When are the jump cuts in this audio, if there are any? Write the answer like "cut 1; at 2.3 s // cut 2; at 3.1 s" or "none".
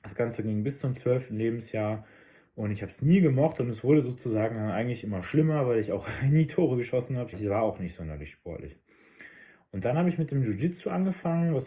cut 1; at 7.3 s